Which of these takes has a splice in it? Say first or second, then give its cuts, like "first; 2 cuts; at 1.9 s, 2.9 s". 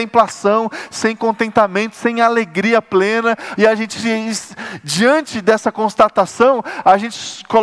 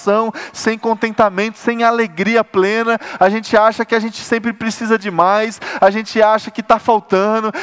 first; 1 cut; at 3.6 s